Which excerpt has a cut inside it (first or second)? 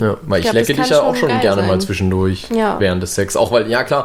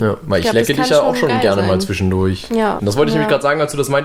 second